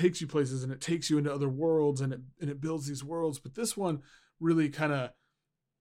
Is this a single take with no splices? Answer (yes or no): yes